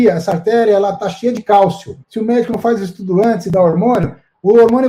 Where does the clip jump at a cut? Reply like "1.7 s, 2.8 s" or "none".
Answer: 2.0 s

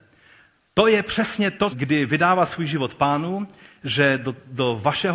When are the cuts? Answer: 1.7 s

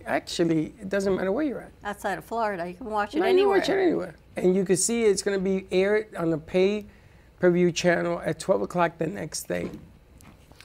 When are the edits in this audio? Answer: none

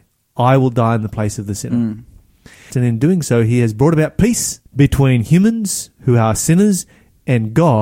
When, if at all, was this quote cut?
2.7 s, 4.7 s

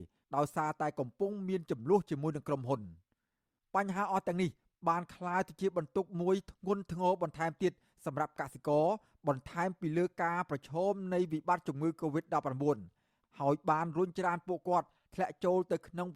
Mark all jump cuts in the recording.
none

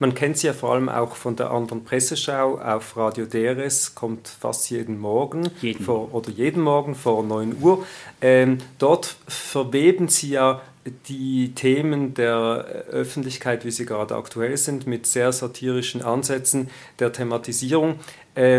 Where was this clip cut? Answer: none

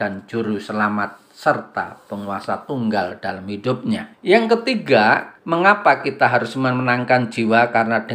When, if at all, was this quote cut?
4.1 s, 5.4 s

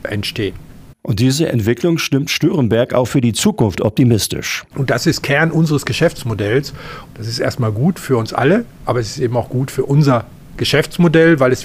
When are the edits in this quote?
0.9 s, 4.7 s, 7.1 s

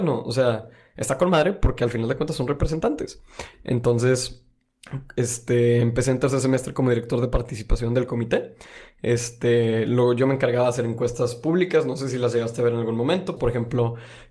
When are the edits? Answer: 3.5 s, 13.4 s

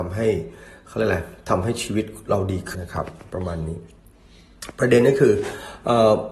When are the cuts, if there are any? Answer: 2.7 s

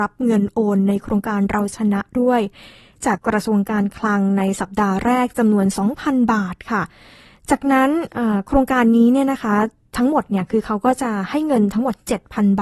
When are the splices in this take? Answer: 3.2 s

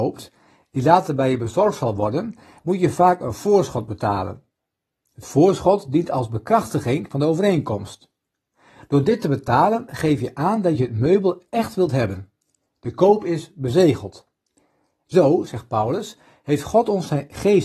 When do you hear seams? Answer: none

